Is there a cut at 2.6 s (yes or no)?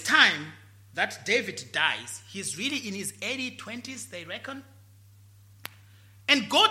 no